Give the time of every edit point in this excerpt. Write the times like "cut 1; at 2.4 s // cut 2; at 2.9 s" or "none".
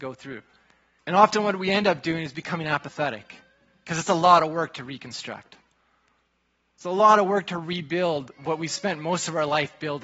cut 1; at 1.0 s